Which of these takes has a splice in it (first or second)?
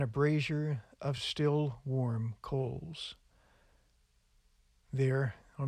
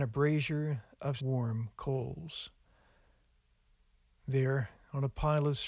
second